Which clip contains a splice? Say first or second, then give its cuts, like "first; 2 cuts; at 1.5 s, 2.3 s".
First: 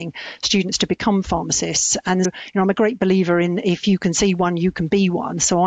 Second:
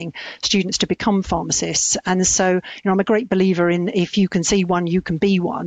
first; 1 cut; at 2.2 s